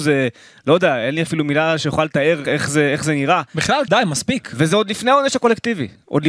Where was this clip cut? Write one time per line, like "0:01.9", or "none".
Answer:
0:02.4
0:03.9